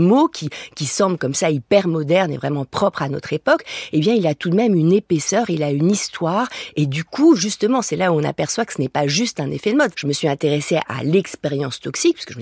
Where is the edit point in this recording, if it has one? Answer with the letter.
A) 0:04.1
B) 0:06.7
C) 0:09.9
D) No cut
C